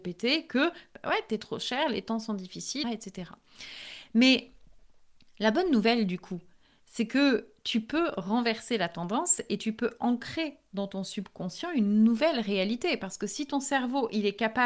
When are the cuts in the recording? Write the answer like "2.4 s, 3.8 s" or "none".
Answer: 2.8 s